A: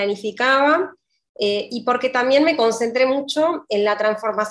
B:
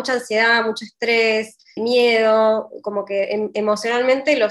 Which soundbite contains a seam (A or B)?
B